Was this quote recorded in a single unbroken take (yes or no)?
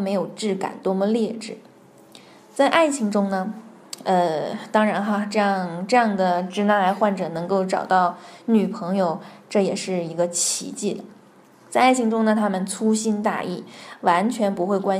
yes